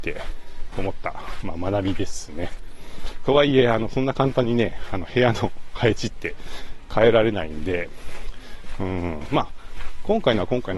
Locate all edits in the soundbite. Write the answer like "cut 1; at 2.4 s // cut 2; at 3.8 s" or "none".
cut 1; at 3.2 s